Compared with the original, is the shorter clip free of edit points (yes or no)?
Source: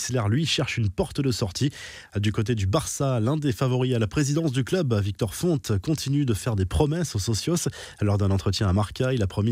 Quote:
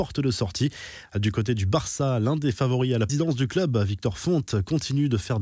no